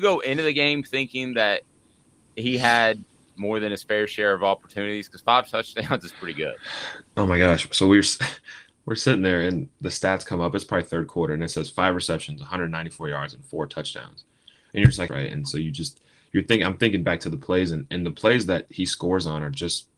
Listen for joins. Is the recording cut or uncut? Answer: cut